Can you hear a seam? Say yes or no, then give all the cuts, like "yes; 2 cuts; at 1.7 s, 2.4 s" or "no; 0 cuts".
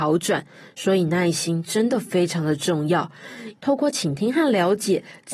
yes; 1 cut; at 3.6 s